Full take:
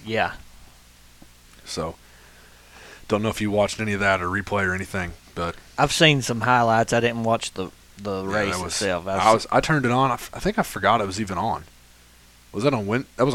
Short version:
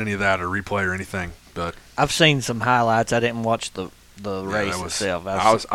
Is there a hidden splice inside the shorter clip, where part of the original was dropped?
no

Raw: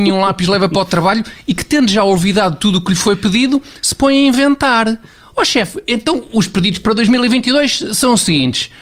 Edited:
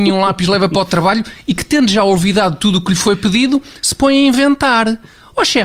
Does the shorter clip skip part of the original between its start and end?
no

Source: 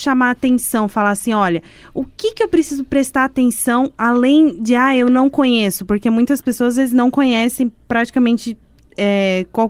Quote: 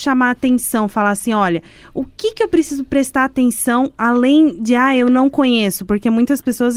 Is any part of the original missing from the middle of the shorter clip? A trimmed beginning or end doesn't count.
no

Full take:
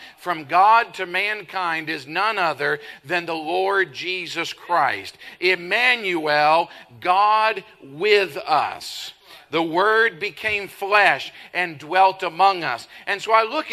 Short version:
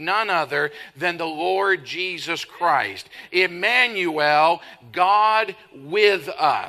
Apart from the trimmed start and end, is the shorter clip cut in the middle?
no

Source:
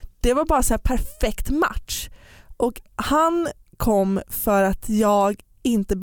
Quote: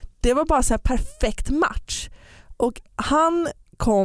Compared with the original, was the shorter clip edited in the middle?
no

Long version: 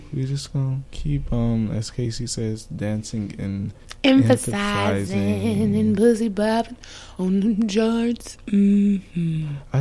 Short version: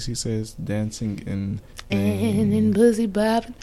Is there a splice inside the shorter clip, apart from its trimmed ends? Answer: yes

